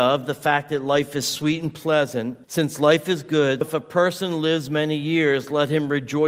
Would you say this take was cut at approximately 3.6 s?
yes; 2 cuts; at 2.4 s, 3.6 s

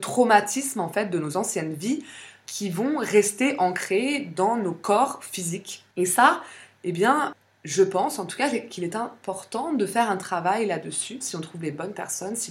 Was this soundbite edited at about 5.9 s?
yes; 2 cuts; at 5.9 s, 11.2 s

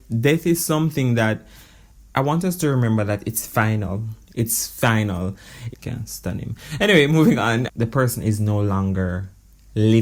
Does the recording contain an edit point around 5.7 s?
yes; 3 cuts; at 4.3 s, 5.7 s, 7.7 s

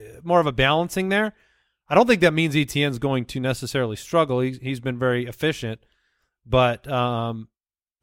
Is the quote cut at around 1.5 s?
no; 0 cuts

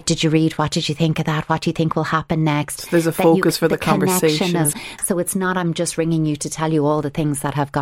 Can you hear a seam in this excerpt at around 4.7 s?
yes; 1 cut; at 4.7 s

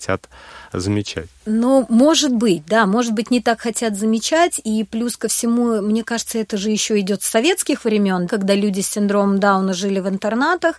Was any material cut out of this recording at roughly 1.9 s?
no; 0 cuts

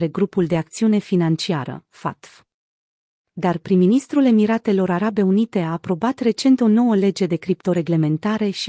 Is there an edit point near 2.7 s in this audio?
no; 0 cuts

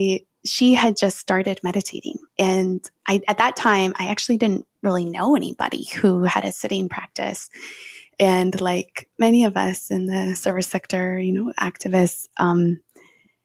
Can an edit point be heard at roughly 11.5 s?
no; 2 cuts; at 2.3 s, 8.1 s

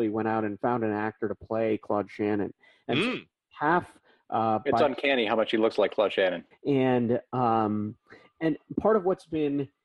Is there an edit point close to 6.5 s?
yes; 1 cut; at 6.5 s

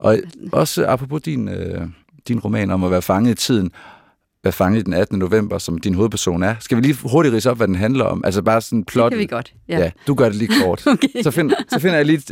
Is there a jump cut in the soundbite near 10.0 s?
yes; 1 cut; at 10.0 s

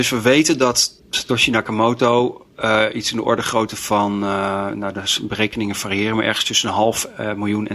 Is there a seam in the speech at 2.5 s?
yes; 2 cuts; at 1.0 s, 2.5 s

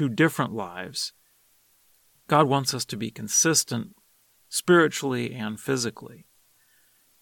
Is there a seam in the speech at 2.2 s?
no; 0 cuts

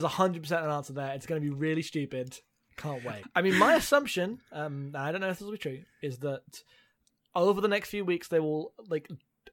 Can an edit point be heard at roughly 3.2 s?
yes; 1 cut; at 3.2 s

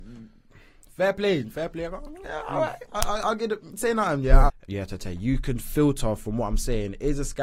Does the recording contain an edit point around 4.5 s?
yes; 1 cut; at 4.5 s

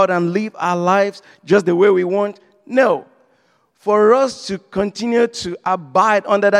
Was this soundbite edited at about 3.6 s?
no; 0 cuts

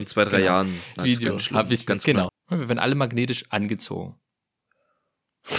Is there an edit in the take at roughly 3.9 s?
no; 2 cuts; at 1.0 s, 2.3 s

